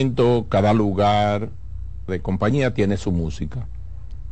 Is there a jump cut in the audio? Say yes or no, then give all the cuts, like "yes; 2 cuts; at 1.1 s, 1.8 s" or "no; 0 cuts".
yes; 1 cut; at 2.1 s